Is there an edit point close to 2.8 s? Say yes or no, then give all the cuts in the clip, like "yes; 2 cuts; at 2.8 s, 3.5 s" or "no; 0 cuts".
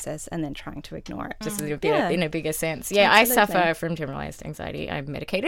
no; 1 cut; at 1.4 s